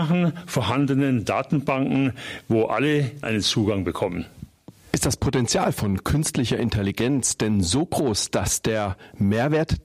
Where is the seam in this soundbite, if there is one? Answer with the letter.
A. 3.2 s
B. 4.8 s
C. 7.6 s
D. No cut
A